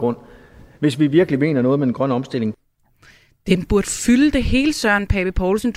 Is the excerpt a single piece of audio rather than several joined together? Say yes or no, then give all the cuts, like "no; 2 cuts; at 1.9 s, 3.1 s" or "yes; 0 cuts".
yes; 0 cuts